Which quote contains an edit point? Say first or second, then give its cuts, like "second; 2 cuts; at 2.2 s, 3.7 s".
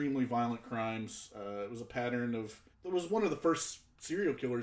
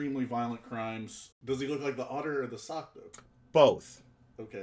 second; 1 cut; at 1.3 s